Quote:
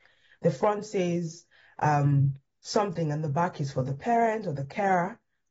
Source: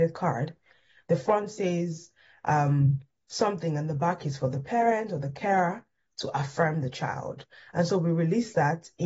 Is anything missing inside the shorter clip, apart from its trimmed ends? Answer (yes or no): no